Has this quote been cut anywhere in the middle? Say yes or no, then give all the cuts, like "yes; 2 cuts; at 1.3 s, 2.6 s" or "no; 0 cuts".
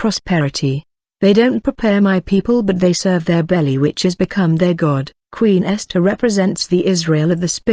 yes; 1 cut; at 5.2 s